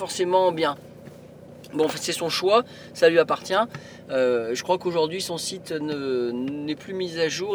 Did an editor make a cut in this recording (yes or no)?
no